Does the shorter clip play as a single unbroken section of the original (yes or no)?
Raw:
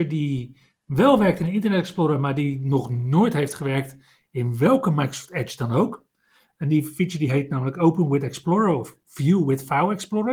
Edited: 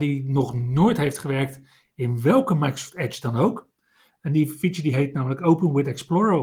yes